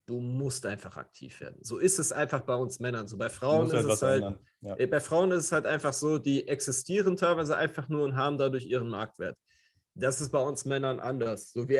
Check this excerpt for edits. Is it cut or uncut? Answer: uncut